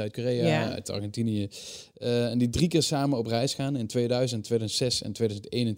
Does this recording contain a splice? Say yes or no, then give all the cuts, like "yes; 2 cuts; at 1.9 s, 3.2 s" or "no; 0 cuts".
no; 0 cuts